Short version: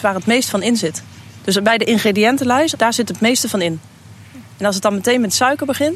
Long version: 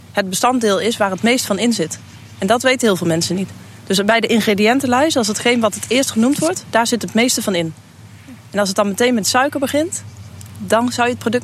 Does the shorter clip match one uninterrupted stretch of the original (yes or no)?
no